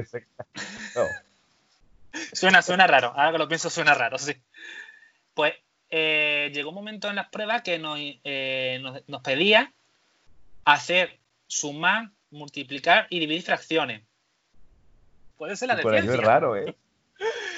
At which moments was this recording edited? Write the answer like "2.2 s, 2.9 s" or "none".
12.2 s, 15.3 s